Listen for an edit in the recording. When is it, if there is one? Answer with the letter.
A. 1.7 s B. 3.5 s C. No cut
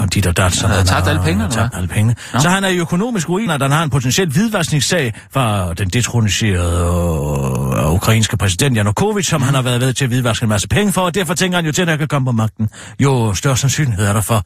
B